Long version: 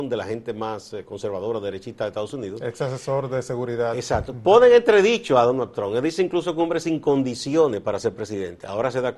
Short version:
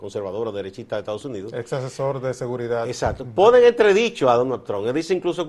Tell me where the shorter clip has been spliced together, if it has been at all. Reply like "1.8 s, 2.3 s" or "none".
none